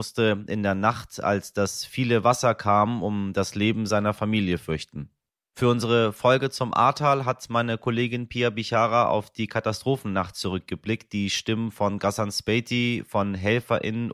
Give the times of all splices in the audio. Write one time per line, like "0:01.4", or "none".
none